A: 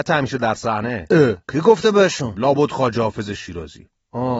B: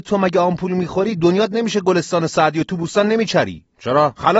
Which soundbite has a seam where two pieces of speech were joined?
A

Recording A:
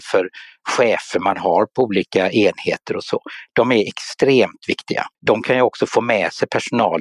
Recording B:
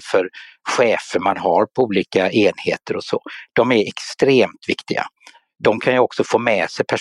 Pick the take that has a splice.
A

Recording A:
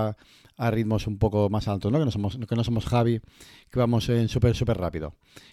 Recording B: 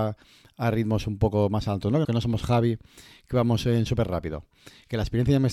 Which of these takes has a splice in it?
B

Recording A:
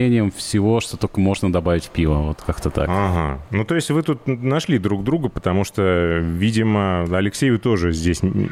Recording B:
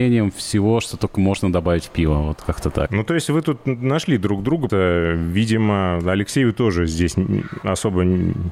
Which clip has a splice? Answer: B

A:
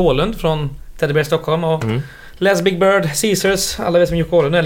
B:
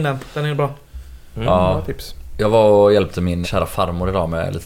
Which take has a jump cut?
B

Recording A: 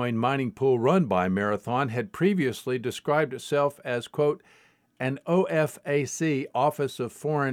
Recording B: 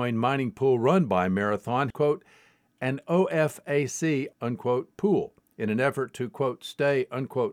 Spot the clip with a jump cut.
B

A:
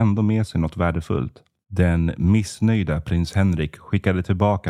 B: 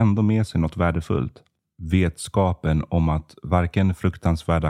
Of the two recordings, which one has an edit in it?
A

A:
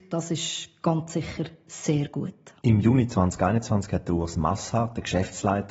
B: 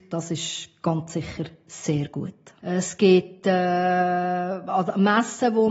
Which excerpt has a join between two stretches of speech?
B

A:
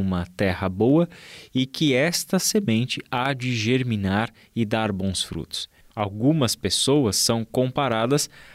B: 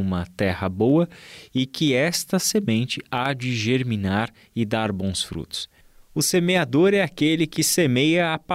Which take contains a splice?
A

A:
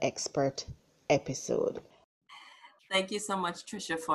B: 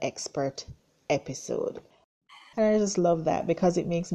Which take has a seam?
B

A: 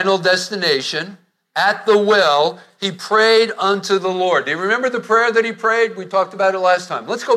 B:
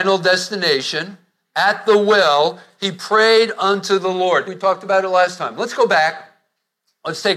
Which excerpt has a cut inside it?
B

